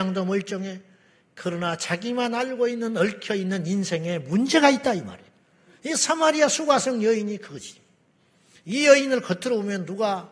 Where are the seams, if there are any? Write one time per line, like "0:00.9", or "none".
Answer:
none